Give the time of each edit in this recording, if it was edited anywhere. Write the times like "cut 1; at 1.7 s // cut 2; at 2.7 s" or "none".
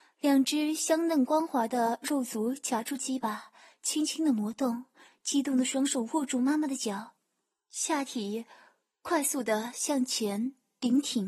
cut 1; at 5.1 s